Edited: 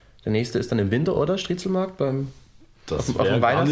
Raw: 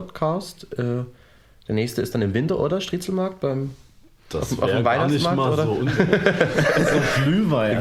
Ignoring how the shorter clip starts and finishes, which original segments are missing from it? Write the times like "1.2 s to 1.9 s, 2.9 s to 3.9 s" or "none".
none